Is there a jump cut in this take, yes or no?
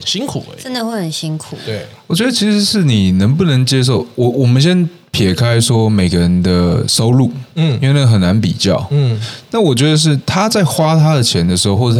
no